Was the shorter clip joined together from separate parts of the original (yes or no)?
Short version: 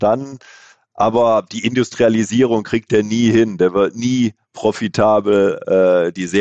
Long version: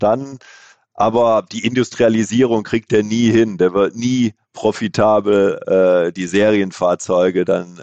no